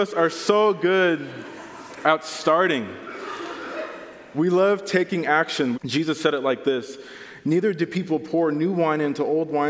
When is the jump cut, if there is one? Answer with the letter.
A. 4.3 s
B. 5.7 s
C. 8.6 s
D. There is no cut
B